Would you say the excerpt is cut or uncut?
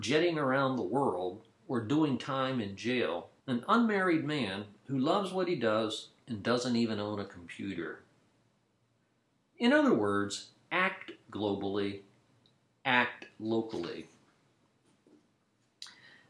cut